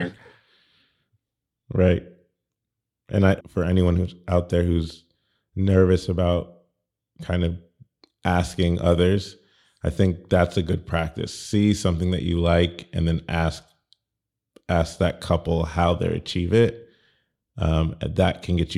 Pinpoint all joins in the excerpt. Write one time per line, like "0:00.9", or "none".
0:03.4